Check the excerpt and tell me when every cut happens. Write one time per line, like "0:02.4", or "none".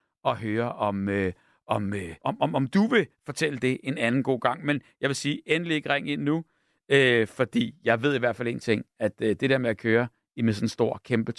0:02.2